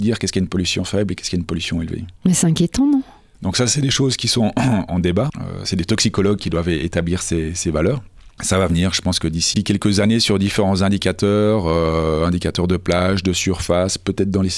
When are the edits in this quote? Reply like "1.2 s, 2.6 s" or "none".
4.9 s